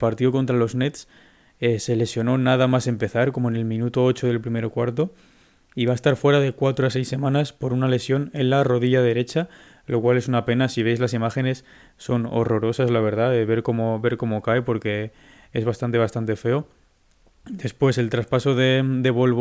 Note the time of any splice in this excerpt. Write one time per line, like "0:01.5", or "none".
none